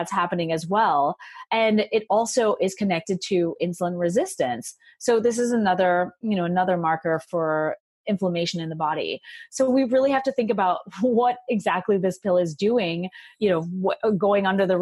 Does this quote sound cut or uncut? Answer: uncut